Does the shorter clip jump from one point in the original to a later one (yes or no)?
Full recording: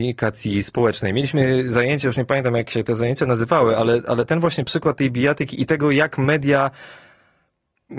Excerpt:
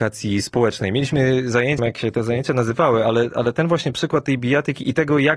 yes